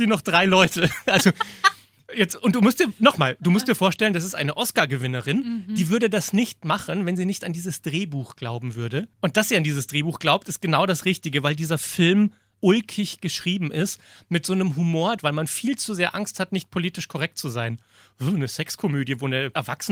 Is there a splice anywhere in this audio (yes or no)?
yes